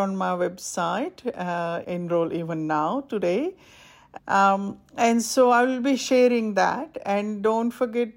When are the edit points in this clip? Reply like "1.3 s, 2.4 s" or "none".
1.8 s, 4.2 s